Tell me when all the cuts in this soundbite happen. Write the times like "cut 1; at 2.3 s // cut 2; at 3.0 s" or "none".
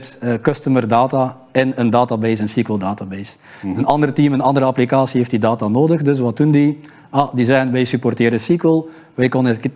none